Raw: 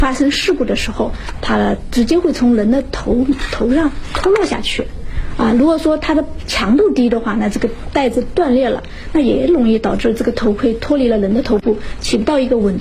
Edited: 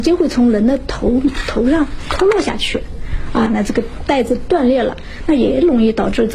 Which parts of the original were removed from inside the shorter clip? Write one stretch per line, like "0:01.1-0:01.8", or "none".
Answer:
0:05.5-0:07.3